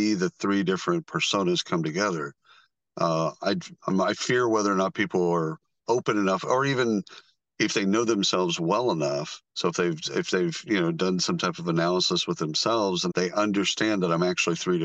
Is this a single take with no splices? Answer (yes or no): no